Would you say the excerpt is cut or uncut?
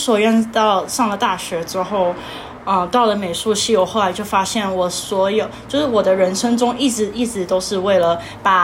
uncut